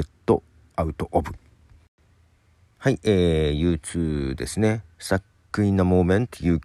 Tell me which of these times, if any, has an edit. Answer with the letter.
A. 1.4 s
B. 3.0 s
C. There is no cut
C